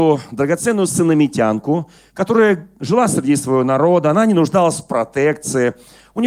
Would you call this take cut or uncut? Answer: cut